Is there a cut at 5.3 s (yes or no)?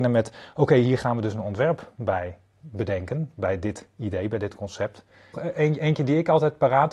yes